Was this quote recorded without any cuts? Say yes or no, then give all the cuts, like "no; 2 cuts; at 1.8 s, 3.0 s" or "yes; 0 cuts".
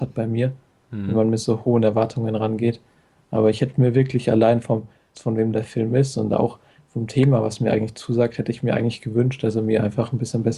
no; 1 cut; at 5.1 s